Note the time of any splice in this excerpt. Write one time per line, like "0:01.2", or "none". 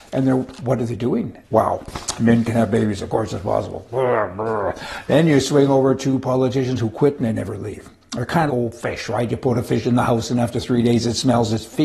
0:01.4
0:08.5